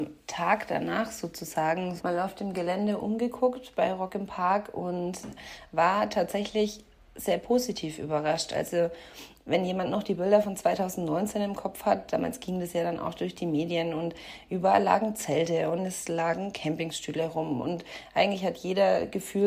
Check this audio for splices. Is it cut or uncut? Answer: cut